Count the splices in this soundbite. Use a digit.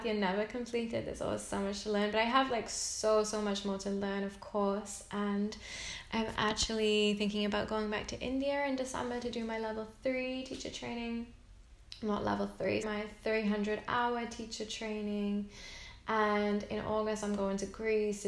1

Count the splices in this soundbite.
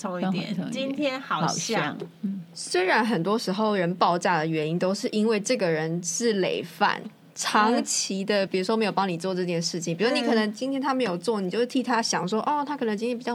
0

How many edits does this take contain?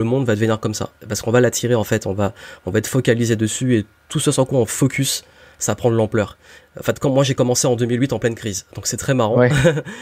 1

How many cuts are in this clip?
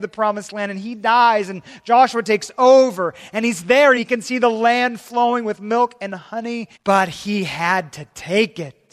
2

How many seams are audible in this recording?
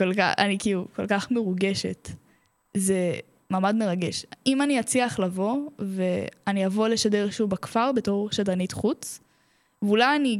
0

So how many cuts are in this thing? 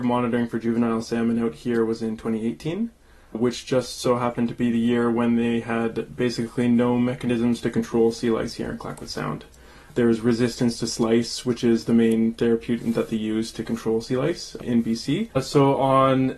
1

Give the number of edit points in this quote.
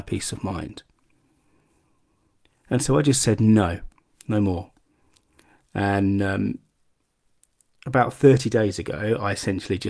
0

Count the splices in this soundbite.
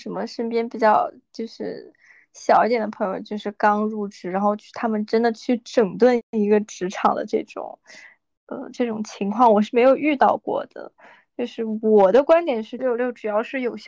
1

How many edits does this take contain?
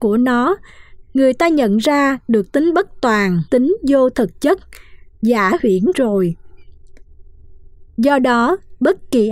1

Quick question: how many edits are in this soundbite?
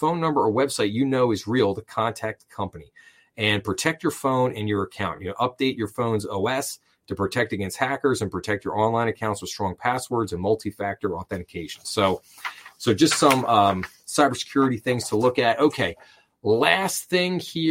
0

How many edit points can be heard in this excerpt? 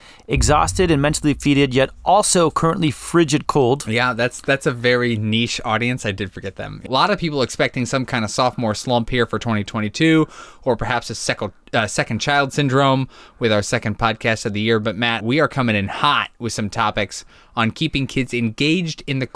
2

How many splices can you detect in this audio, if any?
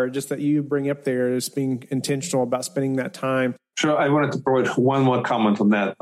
1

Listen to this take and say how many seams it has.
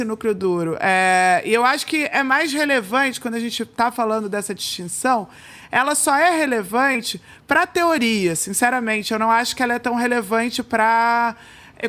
0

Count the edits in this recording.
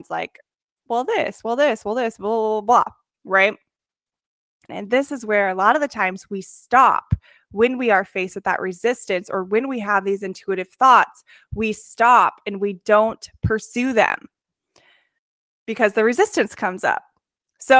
1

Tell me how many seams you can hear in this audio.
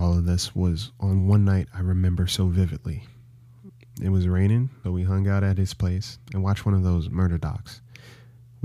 2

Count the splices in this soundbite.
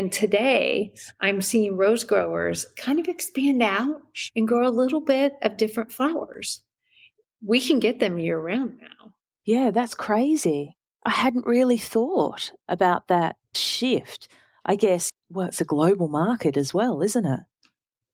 3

